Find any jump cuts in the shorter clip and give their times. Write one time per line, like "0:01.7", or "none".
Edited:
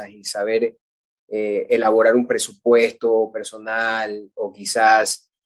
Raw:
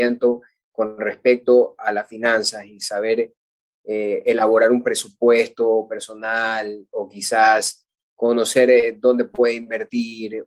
none

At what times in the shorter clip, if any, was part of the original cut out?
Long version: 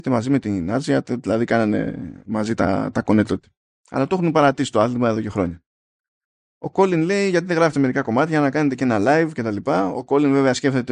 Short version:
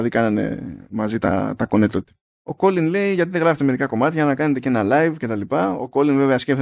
0:02.3

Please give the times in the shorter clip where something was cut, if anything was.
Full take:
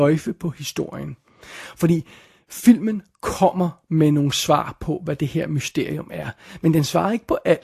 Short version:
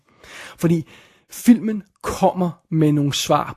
none

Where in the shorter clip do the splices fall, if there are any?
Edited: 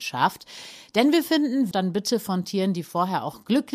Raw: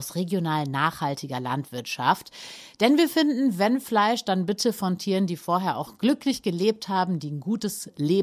0:01.7

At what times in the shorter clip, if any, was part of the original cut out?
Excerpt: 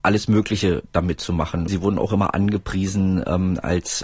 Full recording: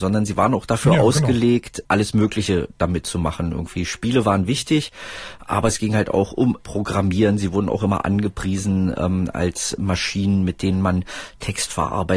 0:01.7

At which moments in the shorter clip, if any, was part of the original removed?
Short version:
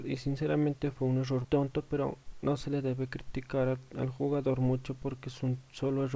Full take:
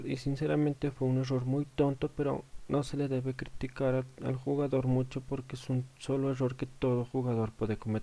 0:01.4

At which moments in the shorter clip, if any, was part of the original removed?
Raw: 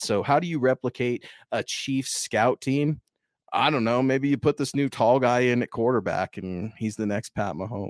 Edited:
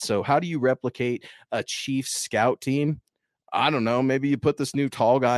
none

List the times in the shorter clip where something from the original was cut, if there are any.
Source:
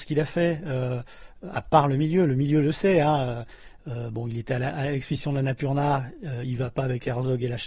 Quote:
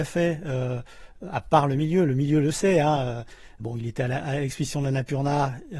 0:03.6

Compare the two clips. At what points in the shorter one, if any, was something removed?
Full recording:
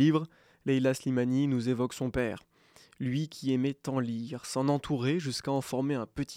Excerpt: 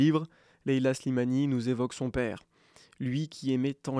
none

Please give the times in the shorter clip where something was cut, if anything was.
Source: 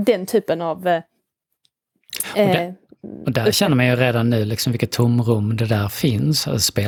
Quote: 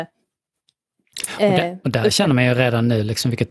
0:01.8

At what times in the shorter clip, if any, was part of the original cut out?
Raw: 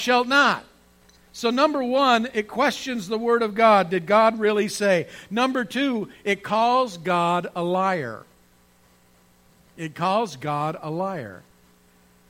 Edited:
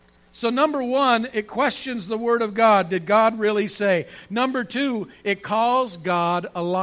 none

